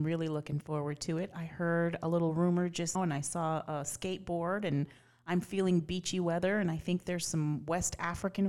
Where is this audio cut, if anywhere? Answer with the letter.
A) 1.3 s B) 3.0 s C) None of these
B